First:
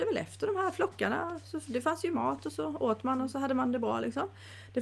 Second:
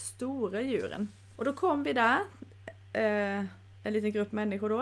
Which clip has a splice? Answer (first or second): second